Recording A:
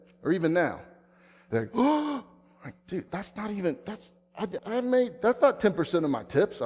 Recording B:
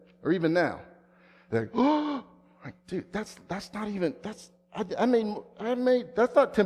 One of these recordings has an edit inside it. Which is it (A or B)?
A